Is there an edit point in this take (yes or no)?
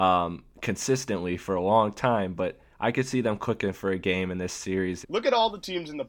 yes